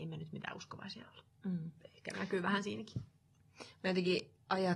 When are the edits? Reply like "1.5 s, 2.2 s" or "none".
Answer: none